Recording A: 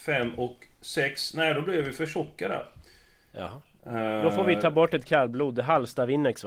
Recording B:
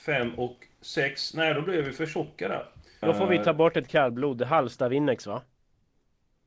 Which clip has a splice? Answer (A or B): B